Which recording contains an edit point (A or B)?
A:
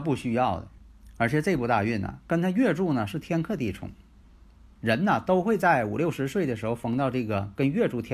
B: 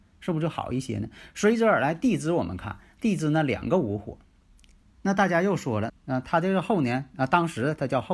B